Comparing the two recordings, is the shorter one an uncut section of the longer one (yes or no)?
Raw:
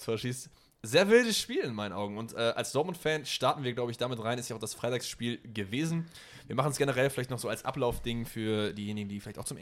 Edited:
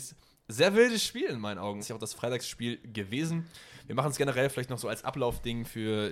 no